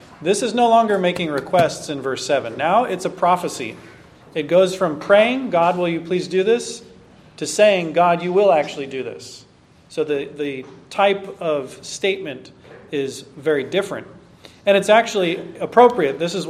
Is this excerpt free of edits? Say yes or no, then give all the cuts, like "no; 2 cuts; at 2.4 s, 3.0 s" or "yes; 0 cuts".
yes; 0 cuts